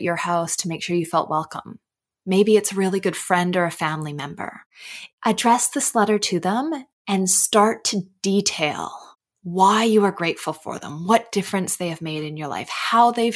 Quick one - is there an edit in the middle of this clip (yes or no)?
no